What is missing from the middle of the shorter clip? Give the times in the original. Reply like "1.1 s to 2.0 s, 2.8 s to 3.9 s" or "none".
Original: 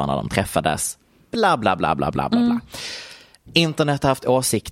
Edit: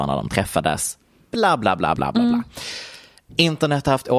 2.0 s to 2.1 s